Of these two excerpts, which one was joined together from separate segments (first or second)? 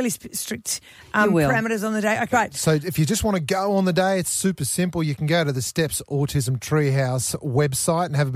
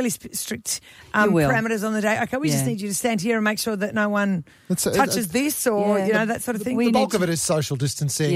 first